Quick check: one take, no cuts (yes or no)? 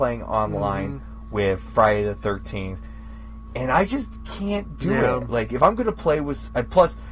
yes